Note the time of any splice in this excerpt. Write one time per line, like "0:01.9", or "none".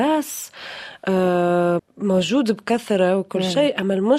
0:01.8